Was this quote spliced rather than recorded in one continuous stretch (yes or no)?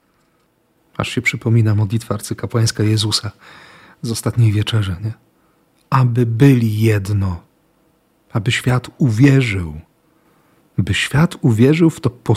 no